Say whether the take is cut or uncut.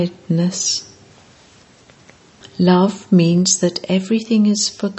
uncut